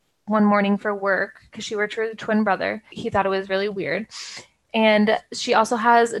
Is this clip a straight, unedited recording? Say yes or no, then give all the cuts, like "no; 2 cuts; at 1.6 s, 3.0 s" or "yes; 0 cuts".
no; 2 cuts; at 2.9 s, 4.6 s